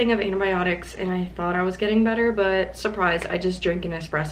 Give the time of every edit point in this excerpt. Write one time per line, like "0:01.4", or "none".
none